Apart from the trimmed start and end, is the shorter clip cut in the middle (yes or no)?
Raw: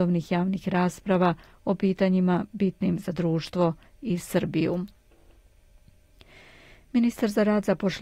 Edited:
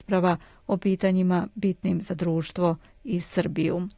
no